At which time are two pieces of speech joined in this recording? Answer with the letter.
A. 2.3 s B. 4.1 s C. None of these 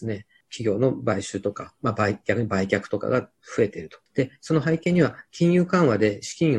B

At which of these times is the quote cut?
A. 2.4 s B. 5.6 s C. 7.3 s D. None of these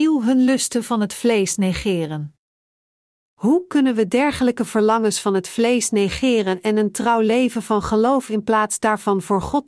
D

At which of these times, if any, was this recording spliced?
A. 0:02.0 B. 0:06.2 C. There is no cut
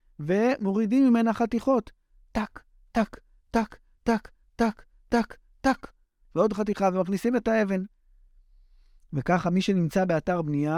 B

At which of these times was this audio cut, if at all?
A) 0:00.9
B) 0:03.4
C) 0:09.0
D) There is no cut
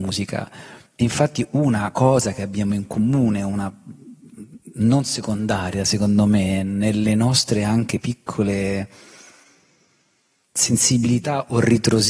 D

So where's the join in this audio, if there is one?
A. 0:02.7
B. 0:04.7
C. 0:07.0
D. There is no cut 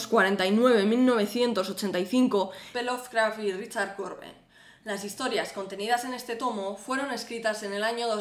A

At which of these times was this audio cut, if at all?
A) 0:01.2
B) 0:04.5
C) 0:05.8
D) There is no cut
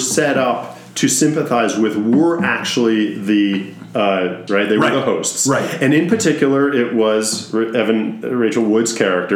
B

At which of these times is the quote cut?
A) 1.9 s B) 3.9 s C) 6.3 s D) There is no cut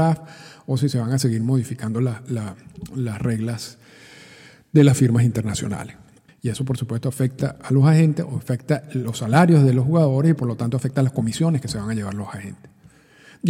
C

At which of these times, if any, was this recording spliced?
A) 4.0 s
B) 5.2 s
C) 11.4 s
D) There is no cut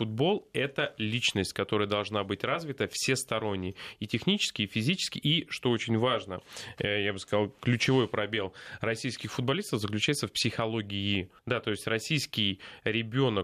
C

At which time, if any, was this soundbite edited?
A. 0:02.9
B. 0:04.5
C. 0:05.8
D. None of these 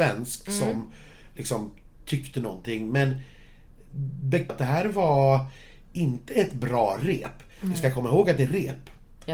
B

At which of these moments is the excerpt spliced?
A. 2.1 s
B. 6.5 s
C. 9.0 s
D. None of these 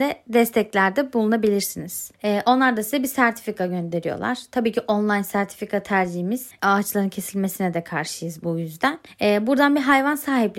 A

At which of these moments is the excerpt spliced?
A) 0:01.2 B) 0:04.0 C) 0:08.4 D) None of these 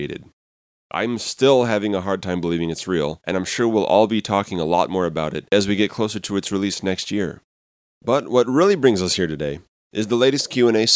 D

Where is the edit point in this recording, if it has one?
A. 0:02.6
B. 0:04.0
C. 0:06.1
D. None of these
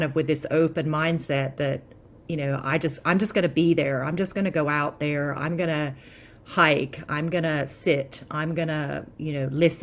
D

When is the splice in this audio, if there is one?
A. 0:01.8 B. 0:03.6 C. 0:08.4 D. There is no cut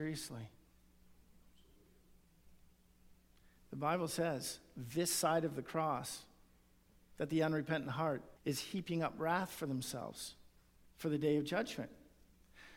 C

